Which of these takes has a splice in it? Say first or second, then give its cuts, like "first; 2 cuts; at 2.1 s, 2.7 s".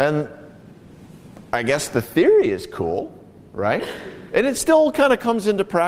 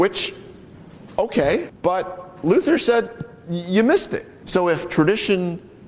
second; 2 cuts; at 1.7 s, 4.4 s